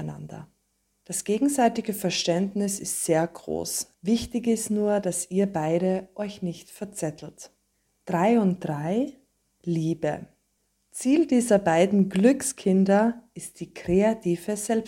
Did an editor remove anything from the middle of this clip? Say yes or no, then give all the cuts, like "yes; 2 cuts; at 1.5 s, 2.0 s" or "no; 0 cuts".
yes; 1 cut; at 3.9 s